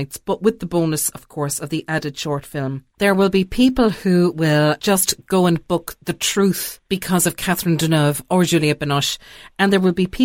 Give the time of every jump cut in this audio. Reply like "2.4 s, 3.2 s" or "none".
2.9 s